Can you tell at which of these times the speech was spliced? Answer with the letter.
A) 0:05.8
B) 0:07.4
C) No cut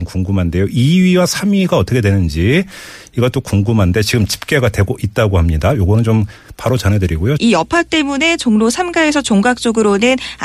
B